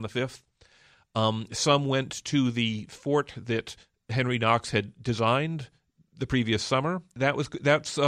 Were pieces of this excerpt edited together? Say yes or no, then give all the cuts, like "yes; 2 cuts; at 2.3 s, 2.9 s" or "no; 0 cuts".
yes; 1 cut; at 7.2 s